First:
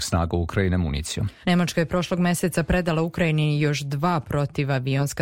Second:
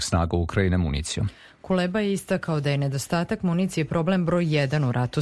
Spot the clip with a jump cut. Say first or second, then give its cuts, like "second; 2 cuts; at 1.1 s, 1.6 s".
first; 1 cut; at 1.4 s